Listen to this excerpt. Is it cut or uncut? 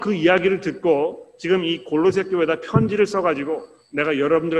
uncut